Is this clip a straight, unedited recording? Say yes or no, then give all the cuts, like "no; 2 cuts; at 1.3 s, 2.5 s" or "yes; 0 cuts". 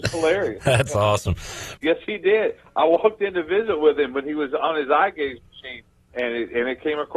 no; 2 cuts; at 1.8 s, 6.1 s